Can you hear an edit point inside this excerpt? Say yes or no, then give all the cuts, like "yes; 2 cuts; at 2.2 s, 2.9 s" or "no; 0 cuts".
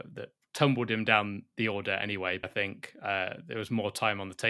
yes; 1 cut; at 2.4 s